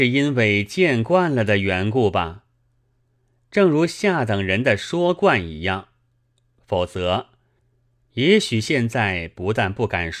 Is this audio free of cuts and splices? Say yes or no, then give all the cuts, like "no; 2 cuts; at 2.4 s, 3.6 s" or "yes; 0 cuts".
yes; 0 cuts